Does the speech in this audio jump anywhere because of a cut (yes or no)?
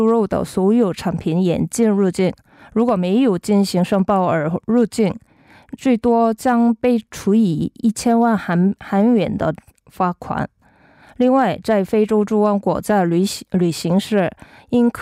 no